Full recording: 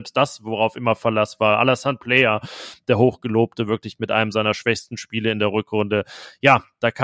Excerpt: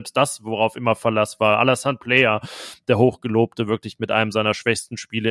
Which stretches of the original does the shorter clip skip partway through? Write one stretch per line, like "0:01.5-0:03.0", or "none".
none